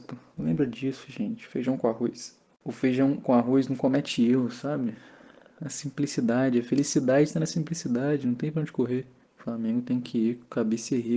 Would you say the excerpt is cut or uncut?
cut